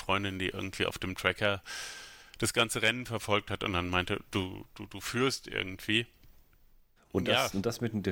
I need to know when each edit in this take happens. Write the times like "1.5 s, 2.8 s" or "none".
7.0 s